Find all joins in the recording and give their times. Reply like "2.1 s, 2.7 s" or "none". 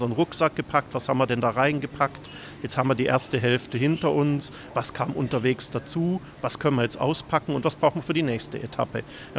none